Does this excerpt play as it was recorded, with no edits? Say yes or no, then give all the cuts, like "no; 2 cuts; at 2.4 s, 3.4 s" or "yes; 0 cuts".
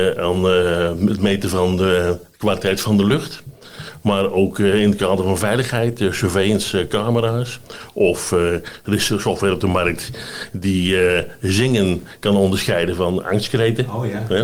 yes; 0 cuts